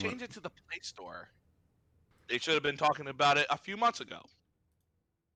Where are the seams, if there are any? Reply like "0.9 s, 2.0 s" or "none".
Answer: 2.1 s